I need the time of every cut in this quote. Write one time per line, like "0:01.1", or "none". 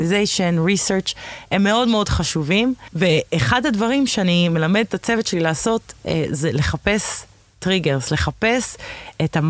none